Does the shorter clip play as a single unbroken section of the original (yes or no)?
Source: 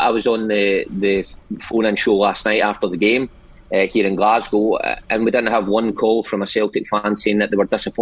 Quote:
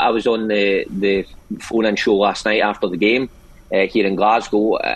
yes